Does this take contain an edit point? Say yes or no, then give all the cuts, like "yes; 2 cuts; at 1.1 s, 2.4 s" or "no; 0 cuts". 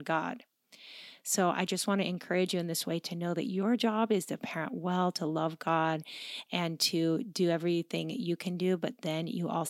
no; 0 cuts